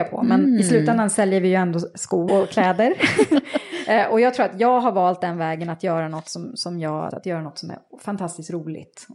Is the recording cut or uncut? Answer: cut